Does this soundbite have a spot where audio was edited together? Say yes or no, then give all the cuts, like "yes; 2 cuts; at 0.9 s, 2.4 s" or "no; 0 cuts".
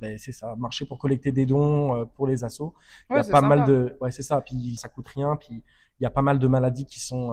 yes; 1 cut; at 4.8 s